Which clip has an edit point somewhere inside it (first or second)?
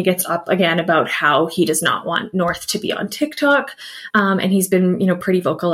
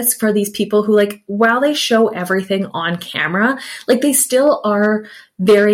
first